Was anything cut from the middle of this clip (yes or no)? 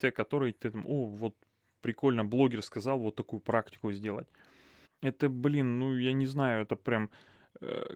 yes